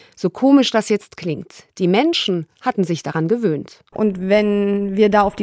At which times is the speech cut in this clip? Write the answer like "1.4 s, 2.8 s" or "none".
3.9 s